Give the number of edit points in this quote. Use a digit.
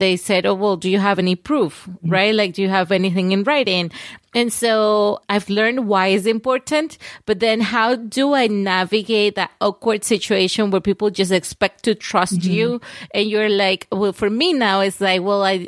0